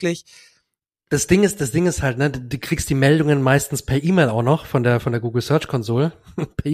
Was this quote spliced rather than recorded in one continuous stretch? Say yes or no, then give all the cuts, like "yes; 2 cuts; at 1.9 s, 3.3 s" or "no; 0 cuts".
yes; 1 cut; at 1.1 s